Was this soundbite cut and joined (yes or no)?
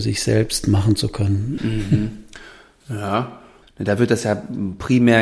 yes